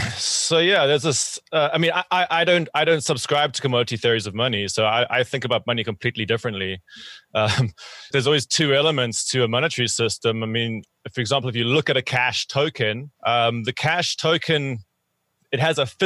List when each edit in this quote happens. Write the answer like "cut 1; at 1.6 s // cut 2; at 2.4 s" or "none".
cut 1; at 8.1 s // cut 2; at 13.2 s